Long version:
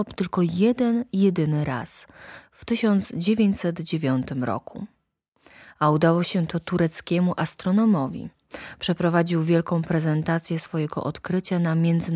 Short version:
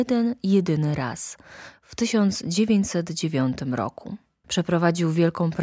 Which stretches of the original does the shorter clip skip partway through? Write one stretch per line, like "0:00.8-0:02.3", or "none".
0:05.1-0:08.8

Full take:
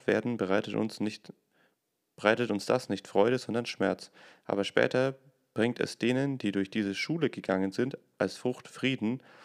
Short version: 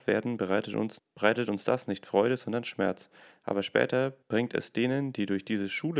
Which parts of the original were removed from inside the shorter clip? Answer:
0:01.0-0:02.0
0:05.2-0:05.5

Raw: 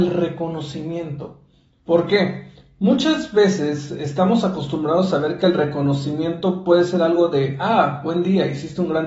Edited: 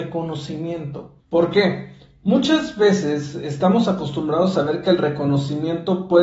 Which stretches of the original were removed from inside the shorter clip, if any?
0:01.5-0:01.8

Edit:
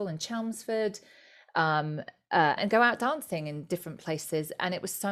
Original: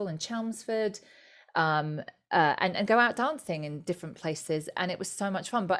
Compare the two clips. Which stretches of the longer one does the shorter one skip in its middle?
0:02.6-0:02.7

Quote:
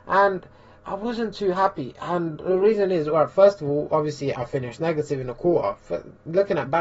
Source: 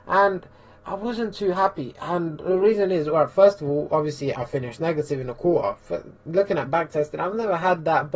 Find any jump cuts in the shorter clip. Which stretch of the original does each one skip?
none

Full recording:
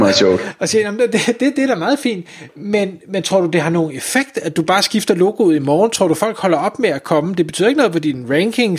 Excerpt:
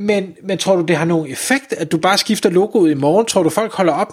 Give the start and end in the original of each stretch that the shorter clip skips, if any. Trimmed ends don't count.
none

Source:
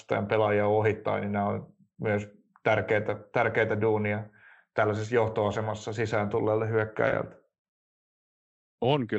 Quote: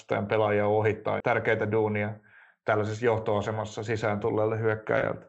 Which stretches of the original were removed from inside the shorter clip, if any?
0:01.2-0:03.3

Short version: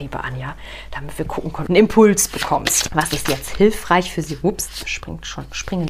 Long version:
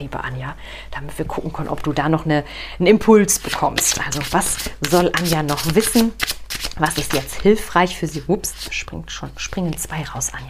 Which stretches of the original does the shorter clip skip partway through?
0:01.7-0:02.8
0:04.0-0:06.7

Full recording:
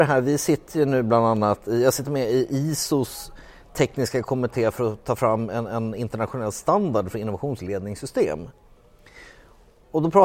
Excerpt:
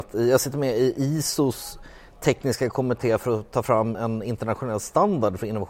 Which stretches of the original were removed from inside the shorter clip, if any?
0:05.5-0:05.7

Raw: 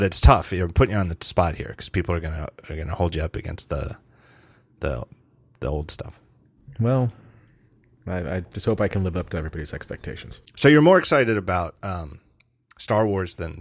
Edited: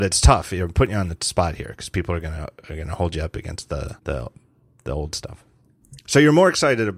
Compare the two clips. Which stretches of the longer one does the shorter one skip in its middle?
0:04.0-0:04.7
0:06.7-0:10.5

